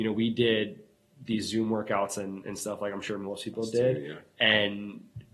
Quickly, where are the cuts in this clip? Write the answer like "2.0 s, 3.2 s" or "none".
none